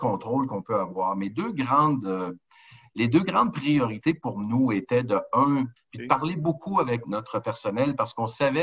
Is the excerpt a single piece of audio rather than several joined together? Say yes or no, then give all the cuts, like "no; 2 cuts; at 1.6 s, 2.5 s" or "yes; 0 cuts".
no; 2 cuts; at 5.8 s, 7.0 s